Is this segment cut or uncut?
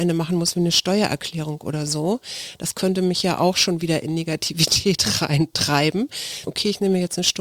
cut